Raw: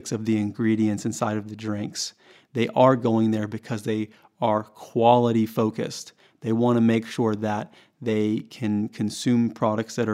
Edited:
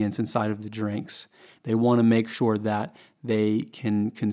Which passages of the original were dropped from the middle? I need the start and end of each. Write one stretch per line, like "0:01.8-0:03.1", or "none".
0:02.4-0:06.4